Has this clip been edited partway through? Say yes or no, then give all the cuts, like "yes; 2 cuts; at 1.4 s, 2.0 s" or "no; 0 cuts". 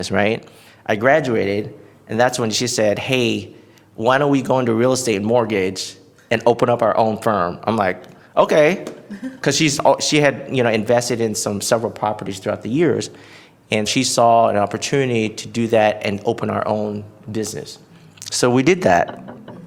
yes; 1 cut; at 13.9 s